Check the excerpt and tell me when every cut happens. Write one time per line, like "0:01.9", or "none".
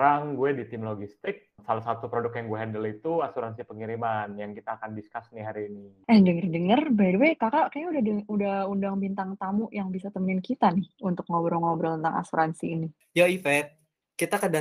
0:01.6
0:06.0